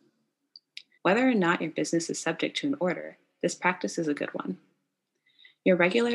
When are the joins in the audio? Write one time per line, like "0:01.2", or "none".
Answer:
0:01.0